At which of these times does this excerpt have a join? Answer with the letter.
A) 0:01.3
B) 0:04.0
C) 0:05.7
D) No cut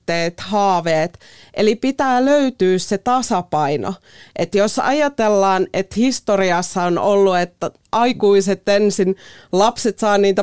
D